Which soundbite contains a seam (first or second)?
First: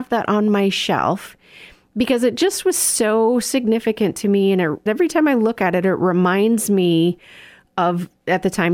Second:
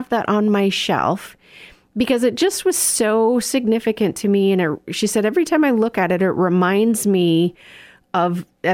first